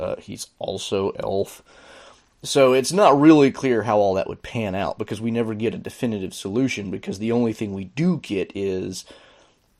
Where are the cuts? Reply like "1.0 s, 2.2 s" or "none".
none